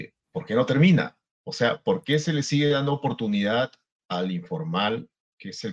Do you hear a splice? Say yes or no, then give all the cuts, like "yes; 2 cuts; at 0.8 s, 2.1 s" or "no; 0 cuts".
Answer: no; 0 cuts